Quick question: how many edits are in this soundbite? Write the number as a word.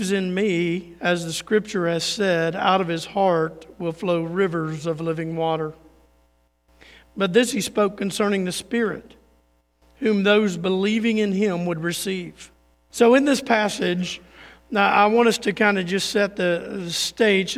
one